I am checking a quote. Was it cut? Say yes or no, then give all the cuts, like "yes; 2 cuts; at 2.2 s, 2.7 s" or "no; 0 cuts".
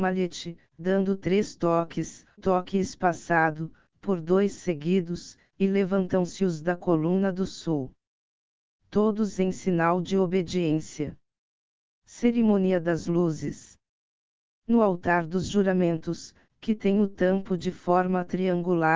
yes; 1 cut; at 2.4 s